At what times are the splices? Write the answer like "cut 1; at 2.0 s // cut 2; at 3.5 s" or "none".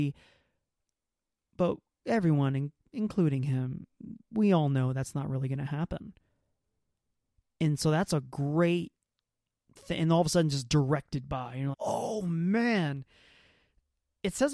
cut 1; at 11.7 s